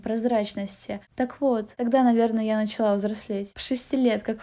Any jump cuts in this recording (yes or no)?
no